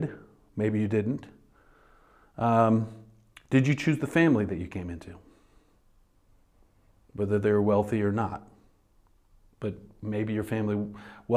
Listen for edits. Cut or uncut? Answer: uncut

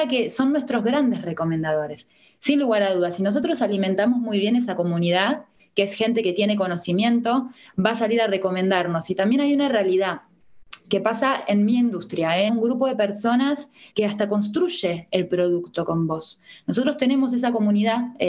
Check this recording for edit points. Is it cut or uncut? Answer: cut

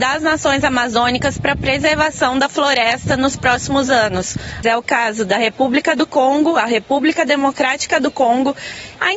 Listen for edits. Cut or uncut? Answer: cut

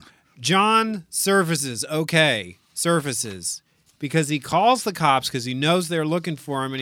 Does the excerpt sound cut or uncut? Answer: uncut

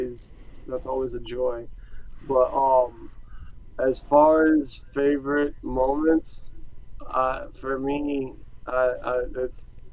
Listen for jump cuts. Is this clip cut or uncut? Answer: uncut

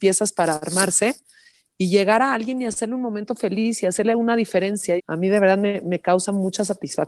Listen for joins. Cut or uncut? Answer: cut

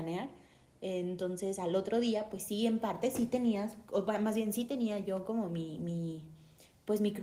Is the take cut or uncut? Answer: uncut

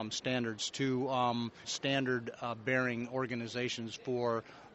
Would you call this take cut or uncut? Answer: cut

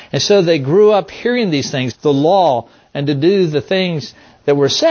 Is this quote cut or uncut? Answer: cut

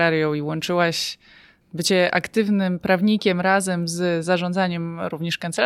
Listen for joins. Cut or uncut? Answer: uncut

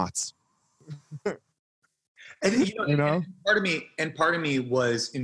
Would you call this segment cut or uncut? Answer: uncut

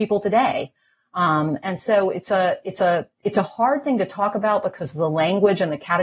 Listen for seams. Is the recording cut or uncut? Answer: uncut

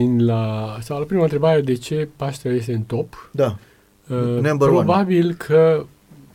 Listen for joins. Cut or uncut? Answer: uncut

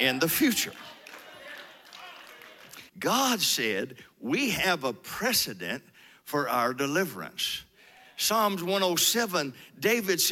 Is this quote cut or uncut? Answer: cut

